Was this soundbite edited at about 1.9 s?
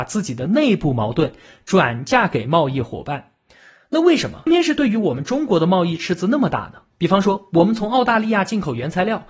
no; 2 cuts; at 4.5 s, 6.9 s

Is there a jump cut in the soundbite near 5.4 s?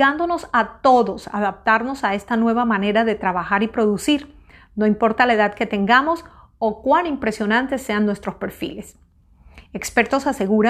no; 1 cut; at 9.7 s

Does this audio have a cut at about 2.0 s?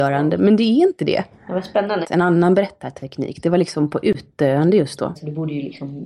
yes; 2 cuts; at 2.0 s, 5.2 s

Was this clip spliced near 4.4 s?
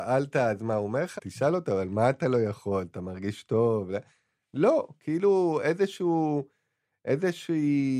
no; 1 cut; at 1.2 s

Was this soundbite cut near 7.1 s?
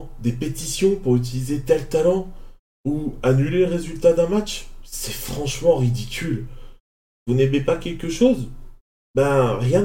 no; 0 cuts

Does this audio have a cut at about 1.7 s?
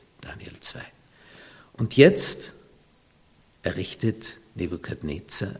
no; 0 cuts

